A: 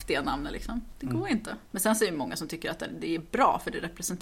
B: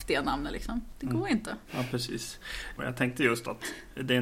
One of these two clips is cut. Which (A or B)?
B